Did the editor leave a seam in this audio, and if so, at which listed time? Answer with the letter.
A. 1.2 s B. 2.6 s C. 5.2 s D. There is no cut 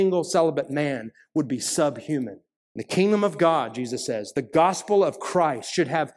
B